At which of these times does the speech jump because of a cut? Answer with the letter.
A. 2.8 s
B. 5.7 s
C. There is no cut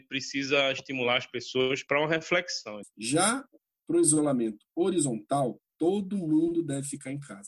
A